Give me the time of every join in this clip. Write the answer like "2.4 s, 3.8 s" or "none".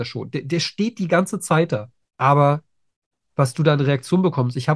2.1 s